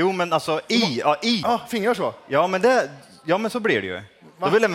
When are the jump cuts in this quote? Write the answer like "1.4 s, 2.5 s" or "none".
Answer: 1.4 s